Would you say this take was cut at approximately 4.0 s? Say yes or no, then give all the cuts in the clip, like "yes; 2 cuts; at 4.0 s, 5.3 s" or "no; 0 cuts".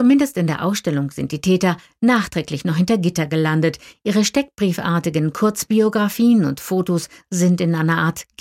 no; 0 cuts